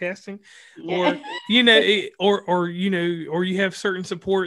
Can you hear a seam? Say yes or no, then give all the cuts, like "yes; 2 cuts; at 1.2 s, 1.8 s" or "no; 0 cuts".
no; 0 cuts